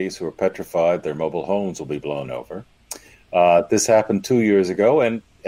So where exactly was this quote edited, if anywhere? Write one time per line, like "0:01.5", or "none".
none